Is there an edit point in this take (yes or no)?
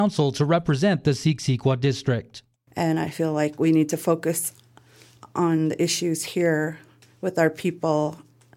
yes